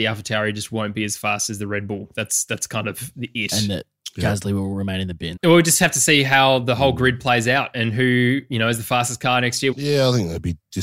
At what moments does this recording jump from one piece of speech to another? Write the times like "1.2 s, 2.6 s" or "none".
5.4 s, 9.7 s